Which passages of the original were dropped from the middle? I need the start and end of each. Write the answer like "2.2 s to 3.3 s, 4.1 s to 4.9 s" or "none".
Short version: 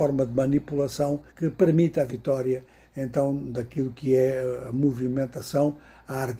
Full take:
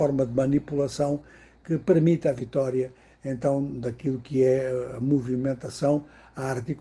1.3 s to 1.6 s